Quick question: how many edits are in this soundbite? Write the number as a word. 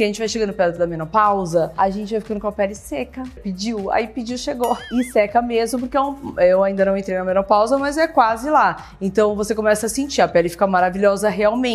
one